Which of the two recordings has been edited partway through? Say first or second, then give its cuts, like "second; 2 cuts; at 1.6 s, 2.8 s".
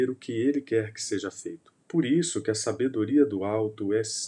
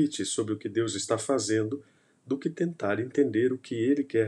first; 1 cut; at 1.8 s